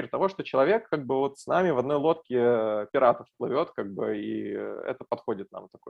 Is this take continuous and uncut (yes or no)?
yes